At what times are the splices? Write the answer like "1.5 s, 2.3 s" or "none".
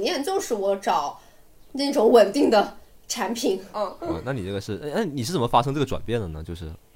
3.7 s